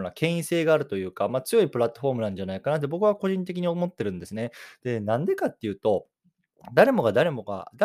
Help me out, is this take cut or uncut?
uncut